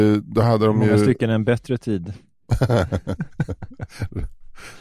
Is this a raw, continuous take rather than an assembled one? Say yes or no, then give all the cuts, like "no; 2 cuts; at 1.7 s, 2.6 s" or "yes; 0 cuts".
yes; 0 cuts